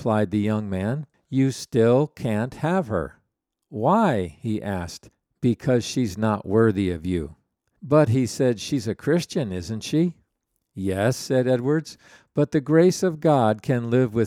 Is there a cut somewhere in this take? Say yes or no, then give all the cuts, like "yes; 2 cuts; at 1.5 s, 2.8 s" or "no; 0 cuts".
no; 0 cuts